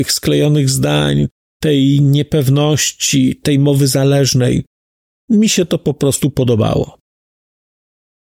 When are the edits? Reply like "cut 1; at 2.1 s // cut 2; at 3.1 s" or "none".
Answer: cut 1; at 1.5 s